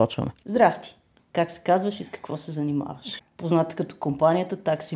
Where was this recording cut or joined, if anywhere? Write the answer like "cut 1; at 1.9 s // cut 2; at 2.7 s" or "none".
cut 1; at 1.2 s // cut 2; at 3.2 s